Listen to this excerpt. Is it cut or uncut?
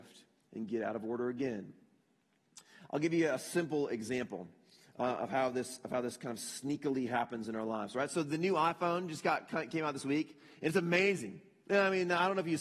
uncut